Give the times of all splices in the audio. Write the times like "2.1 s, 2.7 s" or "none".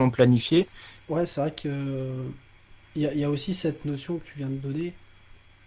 1.0 s